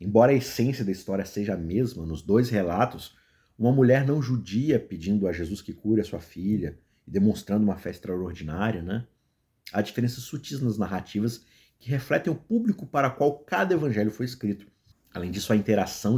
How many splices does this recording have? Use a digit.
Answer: 1